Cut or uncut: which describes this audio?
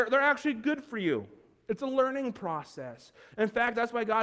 uncut